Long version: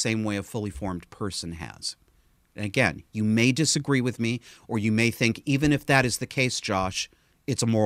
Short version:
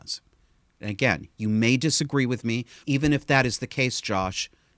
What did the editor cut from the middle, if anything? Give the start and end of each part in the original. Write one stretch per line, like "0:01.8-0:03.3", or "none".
0:04.6-0:05.4